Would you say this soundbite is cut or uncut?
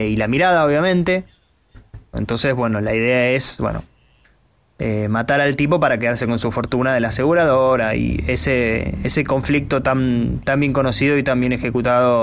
cut